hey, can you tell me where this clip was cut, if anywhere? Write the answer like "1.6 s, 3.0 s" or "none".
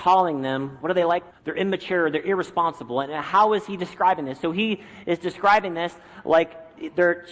1.3 s

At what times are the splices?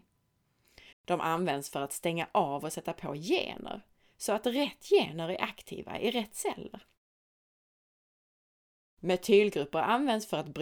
0.9 s

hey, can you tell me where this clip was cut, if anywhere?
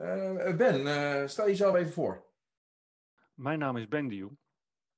none

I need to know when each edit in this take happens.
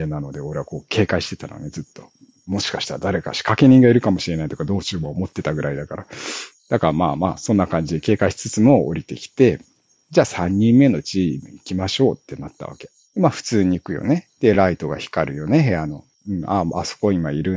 none

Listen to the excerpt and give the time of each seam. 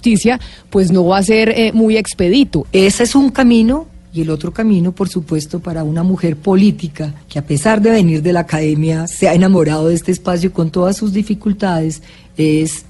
2.6 s, 7.2 s

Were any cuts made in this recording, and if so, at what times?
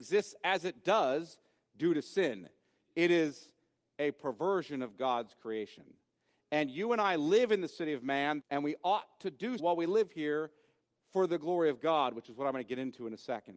8.4 s, 9.6 s

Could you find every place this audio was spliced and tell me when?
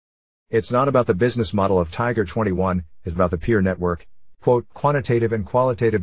4.3 s

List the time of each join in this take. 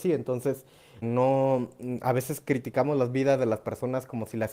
1.0 s

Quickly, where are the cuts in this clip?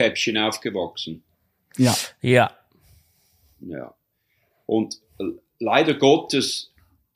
none

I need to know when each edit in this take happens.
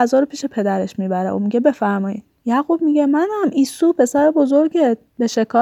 2.4 s

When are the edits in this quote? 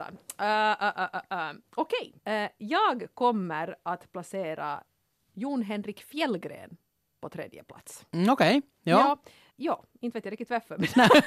2.2 s, 9.5 s

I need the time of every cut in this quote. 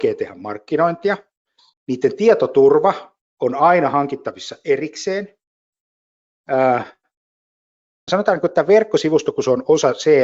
1.7 s, 8.1 s

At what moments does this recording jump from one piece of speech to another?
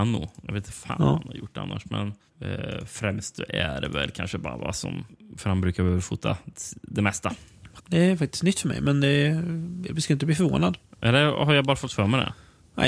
7.8 s

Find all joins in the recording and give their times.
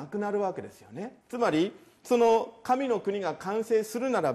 1.2 s

